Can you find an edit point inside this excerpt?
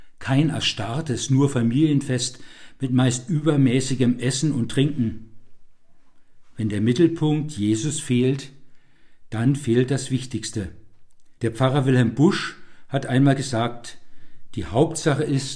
yes; 1 cut; at 11.4 s

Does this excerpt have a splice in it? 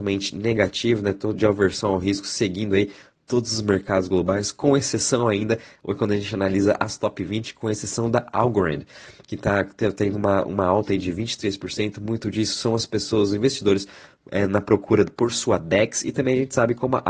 no; 0 cuts

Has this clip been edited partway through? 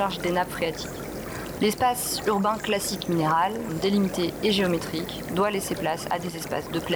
yes; 2 cuts; at 1.6 s, 3.7 s

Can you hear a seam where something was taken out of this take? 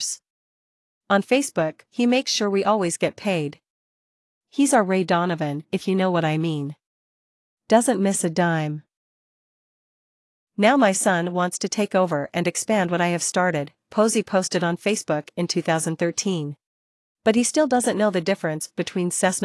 yes; 2 cuts; at 1.9 s, 17.0 s

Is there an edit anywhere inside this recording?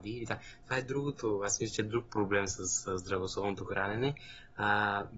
no; 0 cuts

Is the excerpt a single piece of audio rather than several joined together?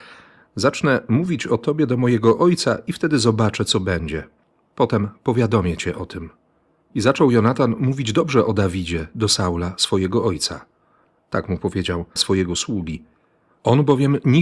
no; 1 cut; at 12.2 s

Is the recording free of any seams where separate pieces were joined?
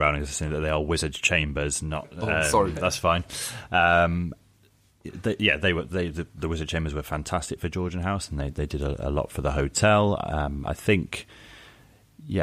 yes; 0 cuts

